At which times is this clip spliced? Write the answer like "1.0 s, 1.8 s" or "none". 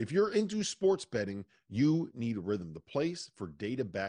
none